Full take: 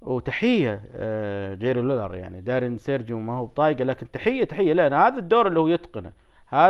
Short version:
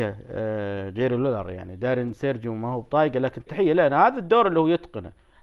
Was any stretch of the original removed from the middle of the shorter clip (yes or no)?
yes